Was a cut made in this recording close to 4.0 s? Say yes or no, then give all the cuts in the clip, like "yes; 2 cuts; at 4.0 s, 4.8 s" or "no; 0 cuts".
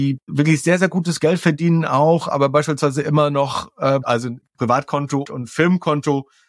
yes; 2 cuts; at 4.0 s, 5.2 s